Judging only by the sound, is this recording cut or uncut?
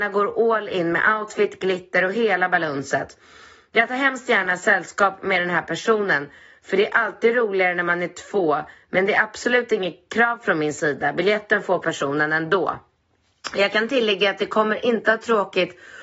uncut